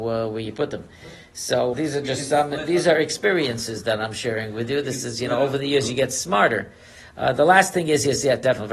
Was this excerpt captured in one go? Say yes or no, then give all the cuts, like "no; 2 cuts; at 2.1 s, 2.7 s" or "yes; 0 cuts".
no; 1 cut; at 1.7 s